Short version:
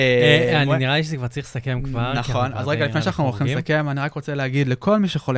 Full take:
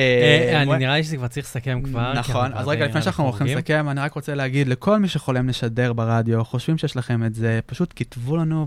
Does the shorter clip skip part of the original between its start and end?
no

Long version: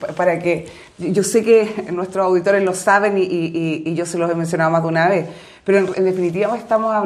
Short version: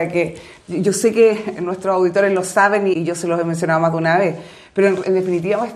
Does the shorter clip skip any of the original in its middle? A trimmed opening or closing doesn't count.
yes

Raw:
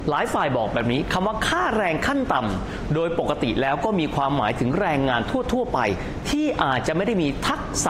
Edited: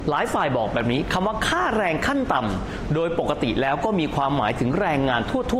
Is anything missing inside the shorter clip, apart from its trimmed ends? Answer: no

